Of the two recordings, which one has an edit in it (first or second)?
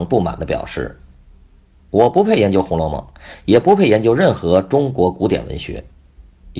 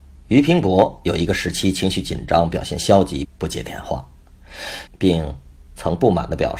second